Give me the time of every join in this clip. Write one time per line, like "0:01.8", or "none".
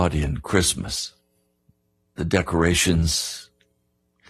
none